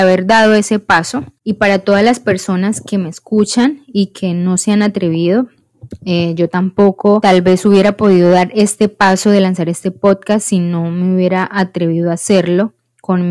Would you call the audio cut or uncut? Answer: uncut